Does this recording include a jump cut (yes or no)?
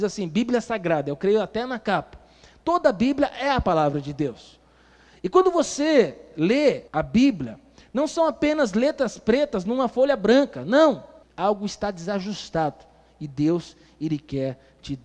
yes